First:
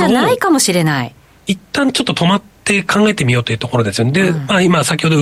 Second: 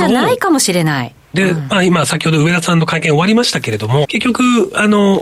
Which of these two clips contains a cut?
second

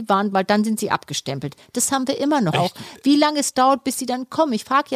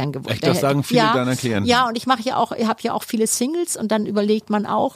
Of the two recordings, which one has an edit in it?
first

